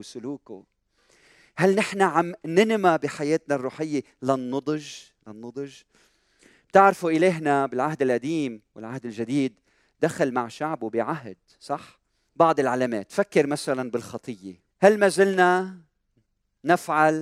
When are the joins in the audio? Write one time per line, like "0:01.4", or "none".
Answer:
0:12.3
0:14.7